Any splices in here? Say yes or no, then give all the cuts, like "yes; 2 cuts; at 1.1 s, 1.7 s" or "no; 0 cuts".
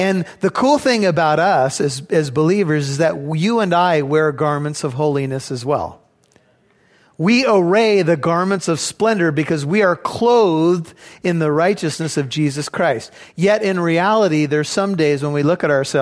no; 0 cuts